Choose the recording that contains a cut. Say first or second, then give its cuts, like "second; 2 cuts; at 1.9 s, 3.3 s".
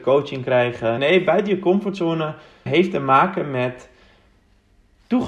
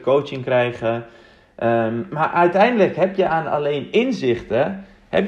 first; 2 cuts; at 1.0 s, 2.7 s